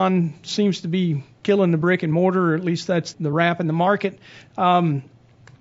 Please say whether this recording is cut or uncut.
cut